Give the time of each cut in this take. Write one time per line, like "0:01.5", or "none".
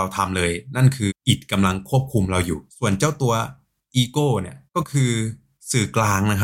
0:01.1
0:02.7
0:04.7